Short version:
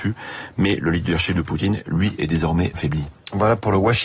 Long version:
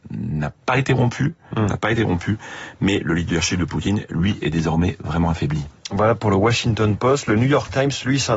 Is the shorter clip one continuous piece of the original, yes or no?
no